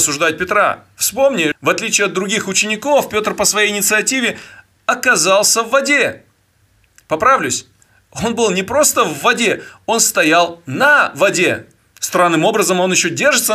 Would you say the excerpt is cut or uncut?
cut